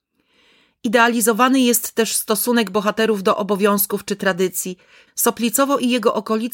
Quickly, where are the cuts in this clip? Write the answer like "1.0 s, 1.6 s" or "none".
5.1 s